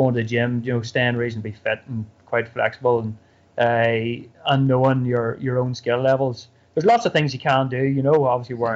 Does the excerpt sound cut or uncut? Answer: uncut